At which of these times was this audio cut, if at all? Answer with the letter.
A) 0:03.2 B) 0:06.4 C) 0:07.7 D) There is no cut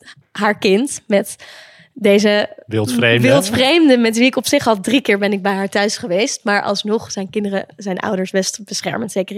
D